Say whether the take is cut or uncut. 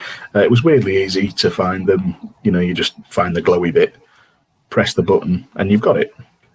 uncut